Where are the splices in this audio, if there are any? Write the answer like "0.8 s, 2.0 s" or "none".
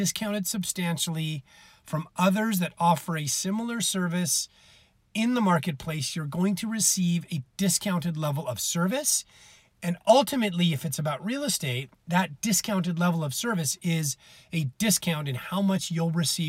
none